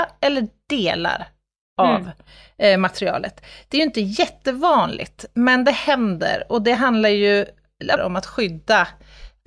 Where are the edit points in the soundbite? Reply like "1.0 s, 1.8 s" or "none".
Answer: 8.0 s